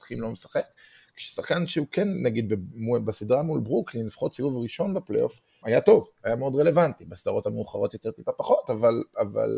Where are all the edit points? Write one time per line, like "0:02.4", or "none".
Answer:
0:05.6